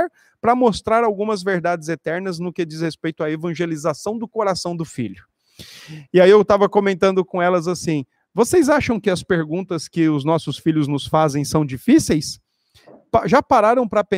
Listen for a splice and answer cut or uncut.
uncut